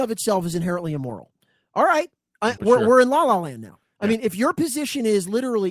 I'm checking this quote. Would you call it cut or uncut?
cut